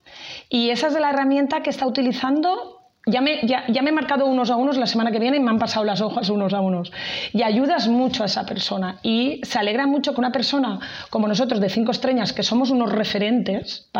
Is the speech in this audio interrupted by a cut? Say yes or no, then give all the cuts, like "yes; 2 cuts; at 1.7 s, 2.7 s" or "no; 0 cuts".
no; 0 cuts